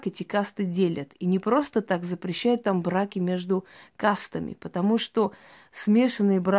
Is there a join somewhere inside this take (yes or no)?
no